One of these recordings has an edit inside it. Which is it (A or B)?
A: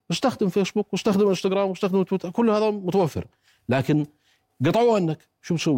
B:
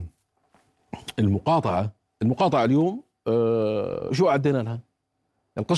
B